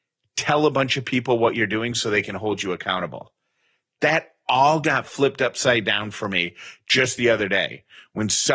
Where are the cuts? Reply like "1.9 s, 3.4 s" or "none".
none